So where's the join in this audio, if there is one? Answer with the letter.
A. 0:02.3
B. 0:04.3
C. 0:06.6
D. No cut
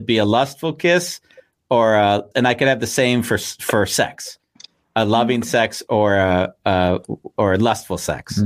A